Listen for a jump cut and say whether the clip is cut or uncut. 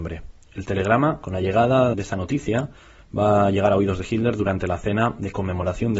cut